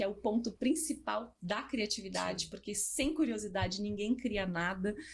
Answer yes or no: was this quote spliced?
no